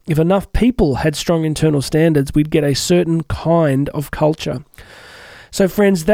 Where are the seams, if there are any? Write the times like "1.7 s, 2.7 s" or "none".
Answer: none